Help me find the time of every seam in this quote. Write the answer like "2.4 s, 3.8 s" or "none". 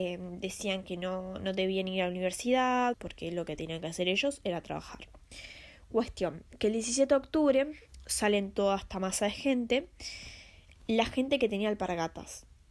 2.9 s